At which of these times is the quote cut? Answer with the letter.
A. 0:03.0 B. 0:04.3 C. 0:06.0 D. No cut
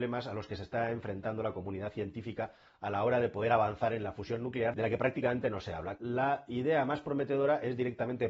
C